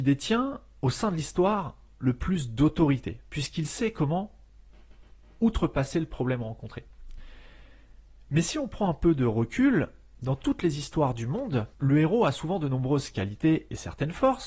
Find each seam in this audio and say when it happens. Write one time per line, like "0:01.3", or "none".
0:08.2
0:11.7